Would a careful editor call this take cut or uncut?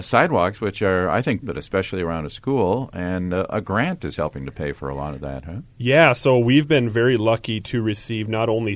cut